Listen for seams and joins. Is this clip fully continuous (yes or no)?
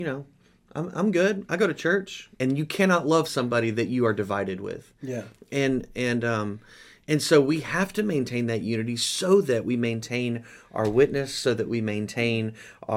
no